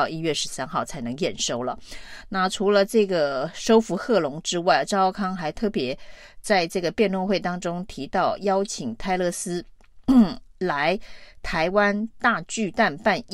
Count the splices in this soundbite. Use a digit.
0